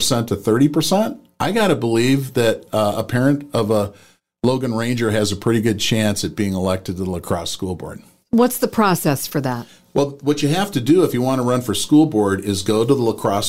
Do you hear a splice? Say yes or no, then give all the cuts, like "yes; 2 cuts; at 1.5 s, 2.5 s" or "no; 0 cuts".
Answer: no; 0 cuts